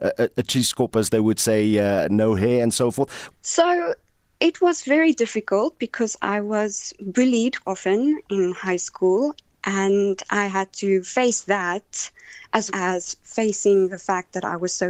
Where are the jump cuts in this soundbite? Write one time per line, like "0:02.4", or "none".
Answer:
0:03.3
0:07.6
0:12.7